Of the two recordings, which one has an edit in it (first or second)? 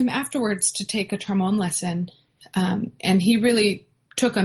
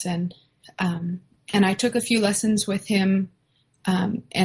first